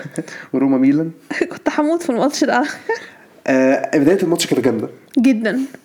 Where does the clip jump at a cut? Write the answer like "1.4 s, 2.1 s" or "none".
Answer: none